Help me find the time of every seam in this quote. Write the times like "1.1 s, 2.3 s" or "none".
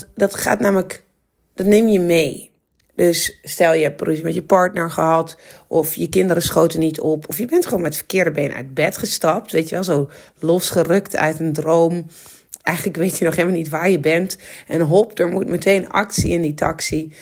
none